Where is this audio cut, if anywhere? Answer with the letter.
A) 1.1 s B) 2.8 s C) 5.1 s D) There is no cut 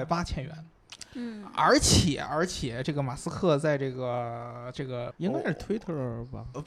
C